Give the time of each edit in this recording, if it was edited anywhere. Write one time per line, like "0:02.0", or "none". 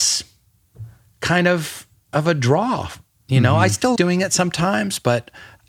0:04.0